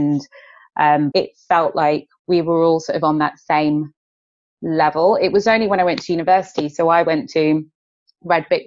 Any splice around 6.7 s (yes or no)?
no